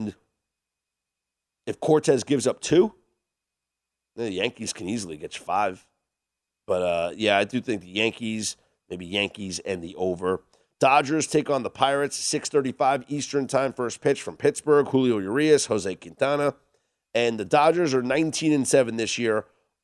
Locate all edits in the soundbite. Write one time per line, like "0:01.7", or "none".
none